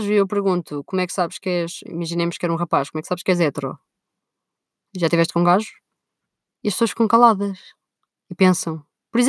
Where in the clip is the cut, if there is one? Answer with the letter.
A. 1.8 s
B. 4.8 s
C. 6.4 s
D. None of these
D